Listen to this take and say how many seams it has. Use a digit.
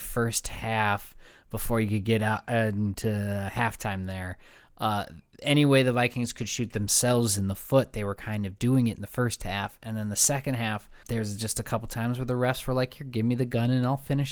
1